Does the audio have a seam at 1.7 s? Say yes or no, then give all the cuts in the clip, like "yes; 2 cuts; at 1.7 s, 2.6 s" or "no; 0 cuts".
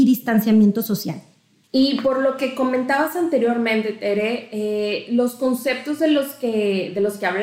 yes; 1 cut; at 1.7 s